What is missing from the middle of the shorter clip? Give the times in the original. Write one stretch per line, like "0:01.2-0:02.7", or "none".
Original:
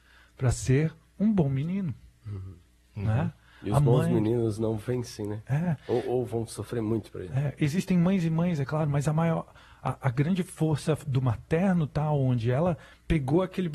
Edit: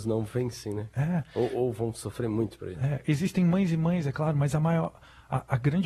none